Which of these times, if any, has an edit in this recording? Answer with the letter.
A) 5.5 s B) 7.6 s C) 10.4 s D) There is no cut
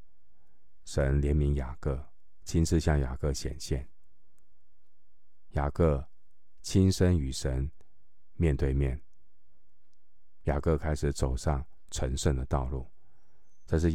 C